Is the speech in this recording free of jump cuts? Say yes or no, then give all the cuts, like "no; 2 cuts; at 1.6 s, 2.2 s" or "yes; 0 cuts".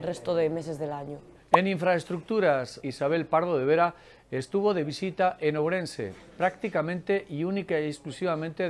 no; 2 cuts; at 1.4 s, 2.8 s